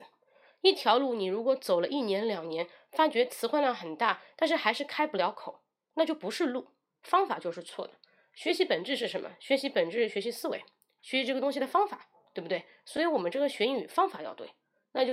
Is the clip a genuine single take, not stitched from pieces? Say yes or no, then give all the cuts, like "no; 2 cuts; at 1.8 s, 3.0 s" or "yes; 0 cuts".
yes; 0 cuts